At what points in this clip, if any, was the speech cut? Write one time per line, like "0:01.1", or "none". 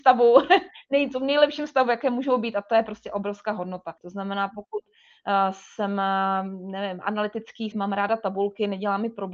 0:04.0
0:07.7